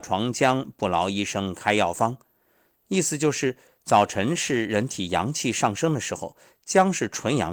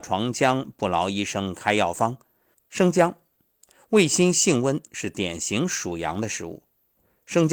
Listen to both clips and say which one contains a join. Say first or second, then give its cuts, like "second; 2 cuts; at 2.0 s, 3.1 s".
second; 2 cuts; at 2.5 s, 4.9 s